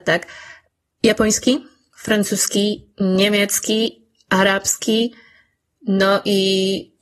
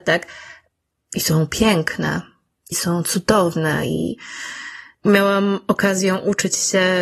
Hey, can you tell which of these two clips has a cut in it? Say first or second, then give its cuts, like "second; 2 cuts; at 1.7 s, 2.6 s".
second; 2 cuts; at 0.9 s, 2.7 s